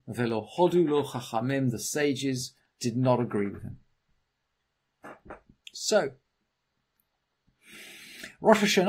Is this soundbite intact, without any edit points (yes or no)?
no